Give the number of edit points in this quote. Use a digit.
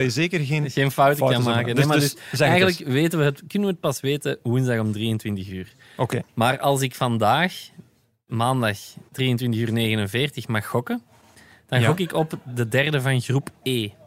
1